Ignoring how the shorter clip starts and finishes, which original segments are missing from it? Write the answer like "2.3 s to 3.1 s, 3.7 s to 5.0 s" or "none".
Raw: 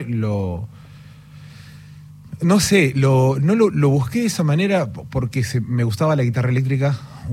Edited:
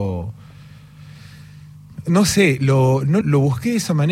3.6 s to 3.7 s